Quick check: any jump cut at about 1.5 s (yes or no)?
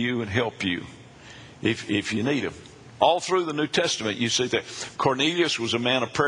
no